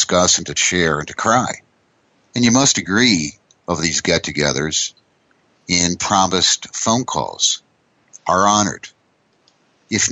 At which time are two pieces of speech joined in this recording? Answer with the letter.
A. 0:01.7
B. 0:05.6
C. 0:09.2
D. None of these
D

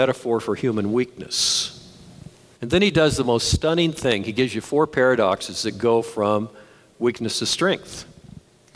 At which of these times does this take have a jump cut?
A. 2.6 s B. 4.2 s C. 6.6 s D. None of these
A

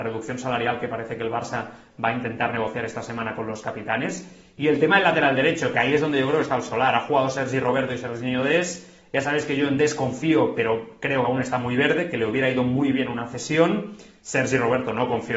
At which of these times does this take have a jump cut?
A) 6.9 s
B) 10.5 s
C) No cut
C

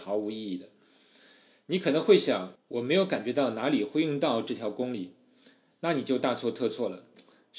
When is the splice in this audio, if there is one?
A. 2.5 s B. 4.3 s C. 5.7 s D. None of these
A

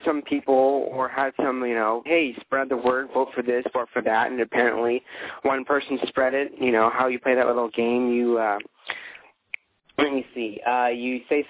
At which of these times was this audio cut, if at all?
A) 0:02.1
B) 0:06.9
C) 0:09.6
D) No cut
A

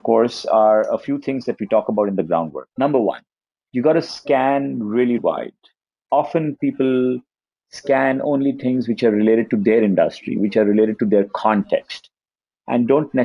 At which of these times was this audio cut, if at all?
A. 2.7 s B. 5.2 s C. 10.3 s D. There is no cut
B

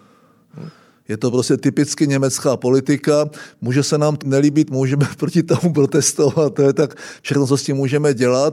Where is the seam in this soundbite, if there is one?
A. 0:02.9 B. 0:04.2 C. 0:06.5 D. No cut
B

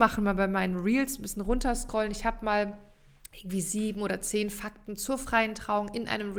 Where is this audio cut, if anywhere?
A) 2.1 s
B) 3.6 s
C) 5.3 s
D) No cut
D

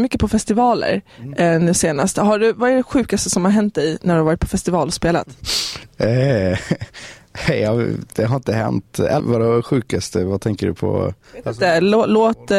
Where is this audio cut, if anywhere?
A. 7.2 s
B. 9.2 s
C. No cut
B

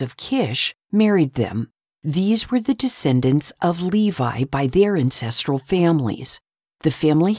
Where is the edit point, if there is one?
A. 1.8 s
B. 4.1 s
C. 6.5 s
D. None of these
A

